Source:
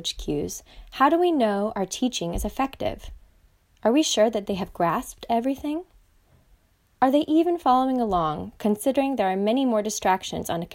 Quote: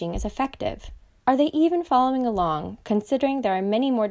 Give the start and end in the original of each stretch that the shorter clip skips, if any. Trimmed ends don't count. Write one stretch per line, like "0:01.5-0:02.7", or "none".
0:03.4-0:06.9